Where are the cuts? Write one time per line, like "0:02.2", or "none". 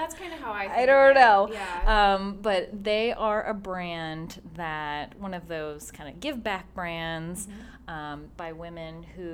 0:08.3